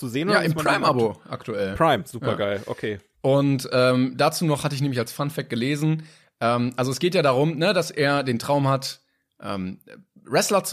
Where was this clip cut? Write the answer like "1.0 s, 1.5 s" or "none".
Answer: none

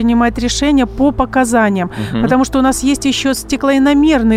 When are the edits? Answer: none

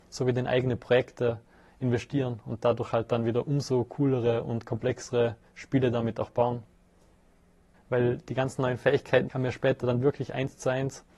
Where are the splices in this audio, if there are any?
7.7 s, 9.3 s

